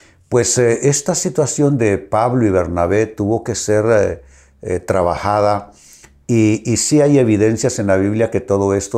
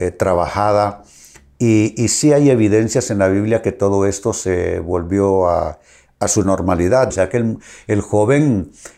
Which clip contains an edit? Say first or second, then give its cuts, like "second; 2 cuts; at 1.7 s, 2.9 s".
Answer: second; 1 cut; at 7.1 s